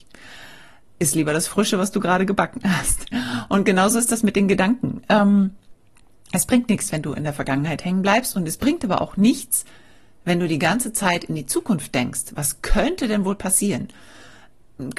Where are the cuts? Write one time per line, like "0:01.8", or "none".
none